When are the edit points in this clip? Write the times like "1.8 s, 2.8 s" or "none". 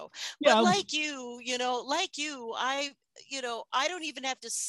none